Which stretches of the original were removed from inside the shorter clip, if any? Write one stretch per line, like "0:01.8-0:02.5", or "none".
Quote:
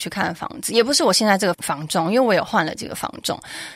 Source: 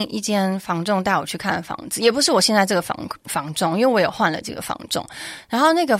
0:02.8-0:03.2